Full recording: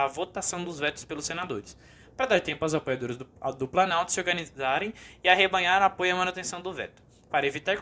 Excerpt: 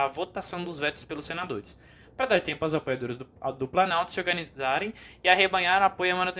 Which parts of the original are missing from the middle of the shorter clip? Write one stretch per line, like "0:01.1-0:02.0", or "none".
none